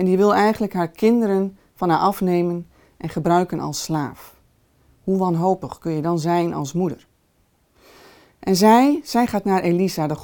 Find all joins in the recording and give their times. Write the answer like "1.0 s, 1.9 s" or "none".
none